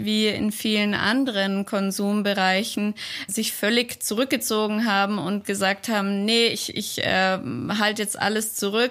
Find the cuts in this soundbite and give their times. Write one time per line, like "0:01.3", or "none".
0:03.3